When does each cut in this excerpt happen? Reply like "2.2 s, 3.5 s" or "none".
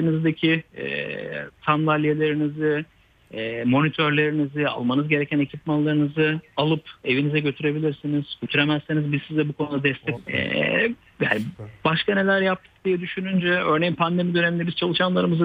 10.1 s